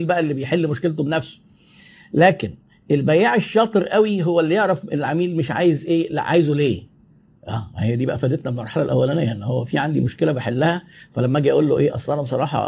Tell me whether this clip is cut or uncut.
uncut